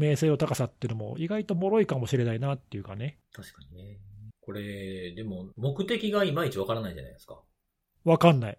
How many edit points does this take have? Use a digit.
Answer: 2